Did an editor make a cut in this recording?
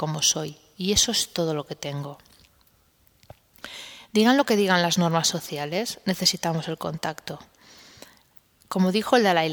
no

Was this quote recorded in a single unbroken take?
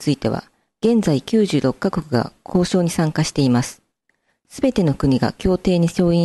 yes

